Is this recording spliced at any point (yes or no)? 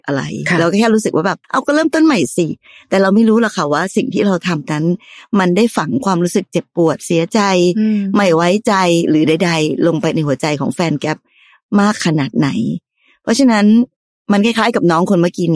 yes